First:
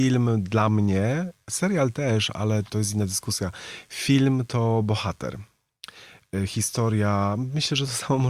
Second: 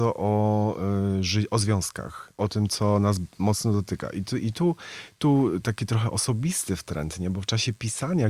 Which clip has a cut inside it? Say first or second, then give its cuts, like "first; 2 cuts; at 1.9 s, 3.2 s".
first; 1 cut; at 2.7 s